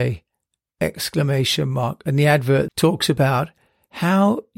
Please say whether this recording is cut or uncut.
cut